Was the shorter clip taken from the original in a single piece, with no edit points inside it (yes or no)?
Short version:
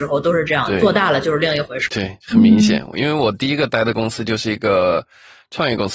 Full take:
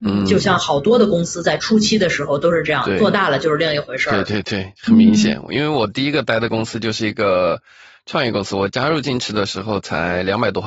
no